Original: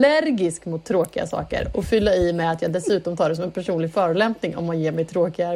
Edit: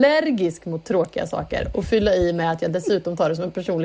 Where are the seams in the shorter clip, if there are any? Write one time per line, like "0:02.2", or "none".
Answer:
none